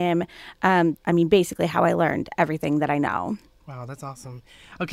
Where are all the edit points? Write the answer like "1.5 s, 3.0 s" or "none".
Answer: 1.0 s